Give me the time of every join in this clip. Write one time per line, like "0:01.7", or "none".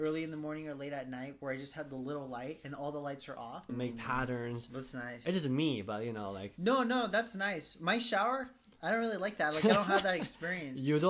0:03.7